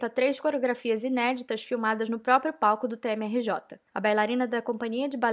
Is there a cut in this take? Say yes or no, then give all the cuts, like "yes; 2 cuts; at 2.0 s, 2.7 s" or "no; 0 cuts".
yes; 1 cut; at 3.9 s